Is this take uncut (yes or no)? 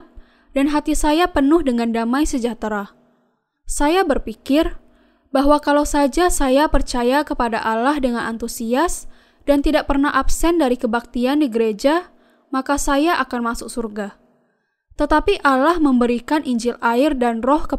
yes